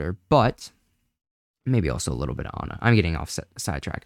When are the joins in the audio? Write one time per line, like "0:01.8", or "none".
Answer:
none